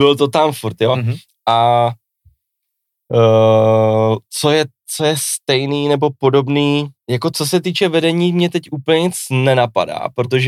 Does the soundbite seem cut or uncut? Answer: uncut